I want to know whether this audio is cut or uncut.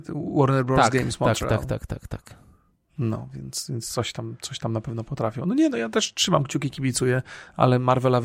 uncut